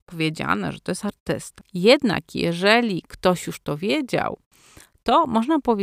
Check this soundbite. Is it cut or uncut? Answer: uncut